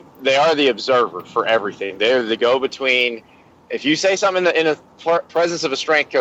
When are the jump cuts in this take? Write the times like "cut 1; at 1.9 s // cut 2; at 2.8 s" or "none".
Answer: none